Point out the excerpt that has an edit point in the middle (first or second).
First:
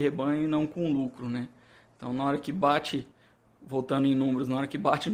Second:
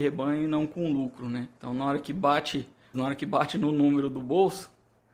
second